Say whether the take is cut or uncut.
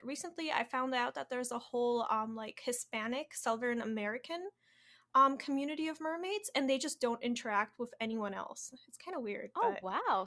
uncut